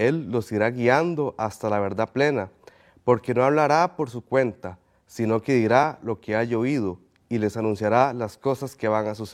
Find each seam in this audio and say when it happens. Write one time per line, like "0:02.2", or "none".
none